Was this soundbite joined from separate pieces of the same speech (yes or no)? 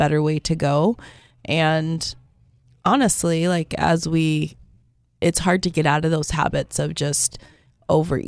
no